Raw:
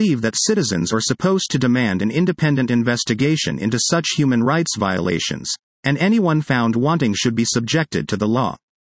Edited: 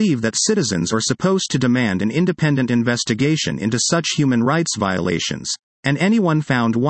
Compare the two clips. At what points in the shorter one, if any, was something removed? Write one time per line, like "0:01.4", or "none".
none